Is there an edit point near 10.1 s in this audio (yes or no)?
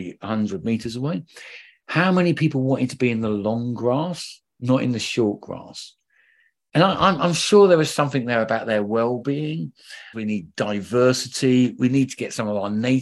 yes